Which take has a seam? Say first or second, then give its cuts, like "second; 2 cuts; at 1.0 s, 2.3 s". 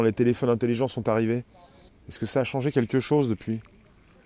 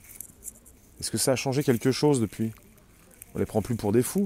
first; 1 cut; at 1.9 s